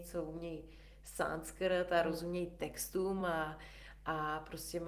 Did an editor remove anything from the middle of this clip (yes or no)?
no